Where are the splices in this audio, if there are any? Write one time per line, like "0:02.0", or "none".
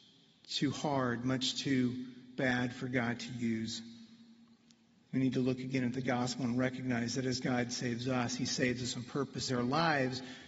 0:05.0
0:09.5